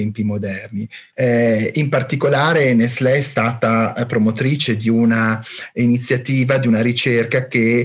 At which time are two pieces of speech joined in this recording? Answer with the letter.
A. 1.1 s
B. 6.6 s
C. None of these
A